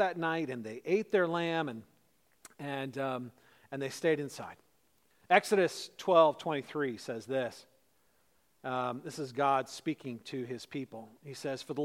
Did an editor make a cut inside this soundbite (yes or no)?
no